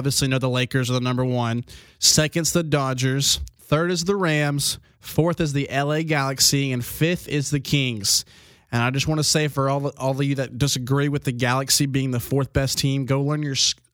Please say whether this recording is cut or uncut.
uncut